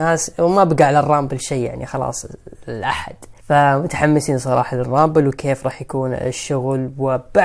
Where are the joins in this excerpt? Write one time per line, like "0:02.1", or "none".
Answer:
0:03.4